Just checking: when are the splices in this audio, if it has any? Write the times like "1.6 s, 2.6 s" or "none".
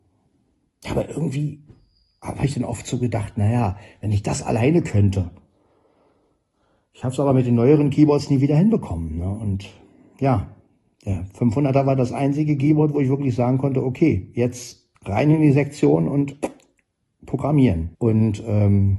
15.0 s, 17.9 s